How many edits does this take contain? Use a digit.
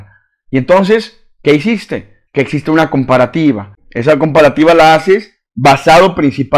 1